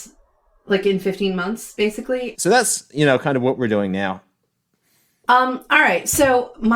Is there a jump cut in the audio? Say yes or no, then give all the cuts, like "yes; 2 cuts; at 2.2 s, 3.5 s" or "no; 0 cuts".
yes; 1 cut; at 2.3 s